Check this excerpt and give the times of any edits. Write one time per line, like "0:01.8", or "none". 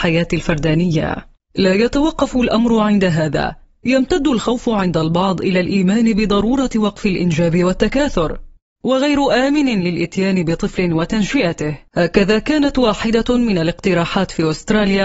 0:01.4
0:08.8
0:11.9